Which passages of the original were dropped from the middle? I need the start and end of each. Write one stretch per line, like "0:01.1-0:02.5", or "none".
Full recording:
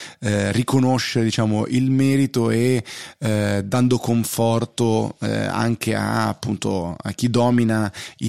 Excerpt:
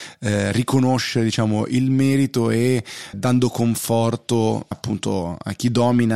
0:03.1-0:03.6
0:05.2-0:06.3